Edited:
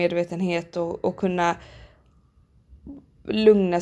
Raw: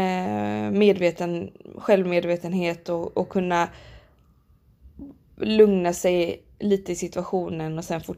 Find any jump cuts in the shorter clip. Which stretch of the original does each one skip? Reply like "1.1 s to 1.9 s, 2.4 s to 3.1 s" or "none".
none